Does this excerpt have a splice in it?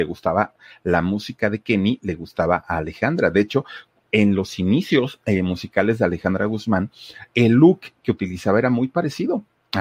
no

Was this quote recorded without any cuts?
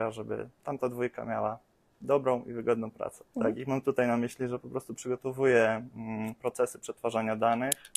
no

